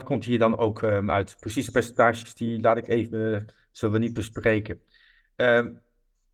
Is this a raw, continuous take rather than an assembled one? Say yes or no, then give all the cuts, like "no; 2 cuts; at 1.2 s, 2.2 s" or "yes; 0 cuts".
yes; 0 cuts